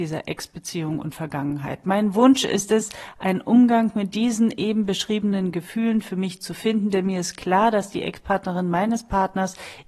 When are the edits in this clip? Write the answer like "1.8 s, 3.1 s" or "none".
none